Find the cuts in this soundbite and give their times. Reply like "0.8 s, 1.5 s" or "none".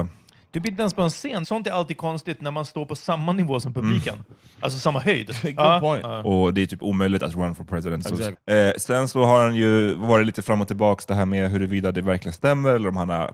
1.4 s, 6.0 s, 8.3 s